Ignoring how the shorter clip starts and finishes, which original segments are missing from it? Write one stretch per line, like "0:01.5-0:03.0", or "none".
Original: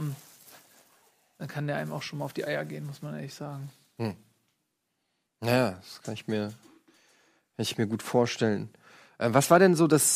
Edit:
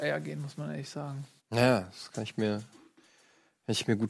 0:03.8-0:05.3